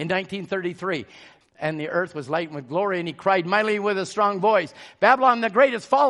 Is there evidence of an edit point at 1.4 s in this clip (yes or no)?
yes